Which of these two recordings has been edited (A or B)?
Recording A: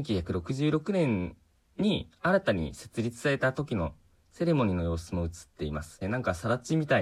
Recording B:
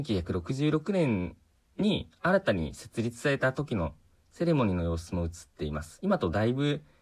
A